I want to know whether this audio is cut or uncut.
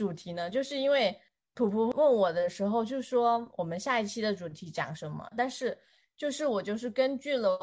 cut